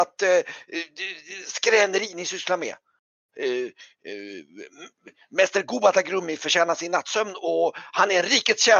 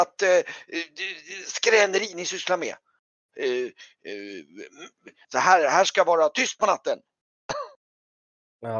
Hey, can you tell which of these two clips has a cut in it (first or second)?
second